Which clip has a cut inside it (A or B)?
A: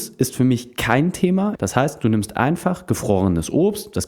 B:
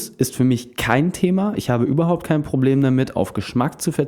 A